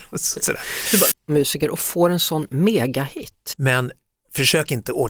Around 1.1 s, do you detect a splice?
yes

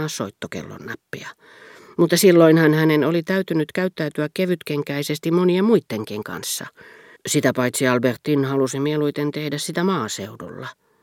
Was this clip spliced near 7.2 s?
yes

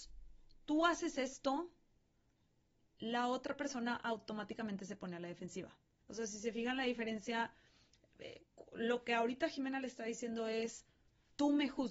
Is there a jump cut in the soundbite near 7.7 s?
no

